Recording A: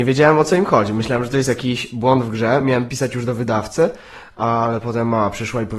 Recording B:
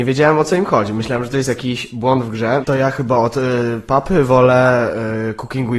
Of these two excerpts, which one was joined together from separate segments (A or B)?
B